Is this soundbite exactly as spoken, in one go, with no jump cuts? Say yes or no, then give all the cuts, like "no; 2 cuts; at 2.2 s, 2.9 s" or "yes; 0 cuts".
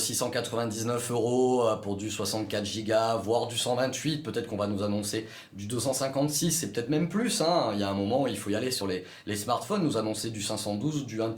yes; 0 cuts